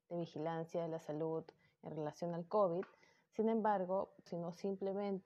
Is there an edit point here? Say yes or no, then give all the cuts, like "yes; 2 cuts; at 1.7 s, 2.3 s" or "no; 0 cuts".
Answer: yes; 1 cut; at 4.3 s